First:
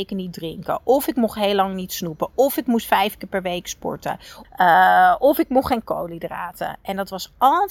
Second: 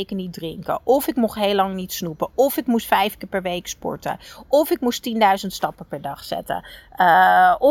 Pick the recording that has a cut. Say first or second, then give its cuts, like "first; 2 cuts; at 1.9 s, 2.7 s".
first; 1 cut; at 4.4 s